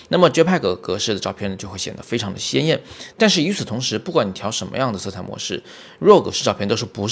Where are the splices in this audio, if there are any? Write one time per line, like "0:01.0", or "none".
none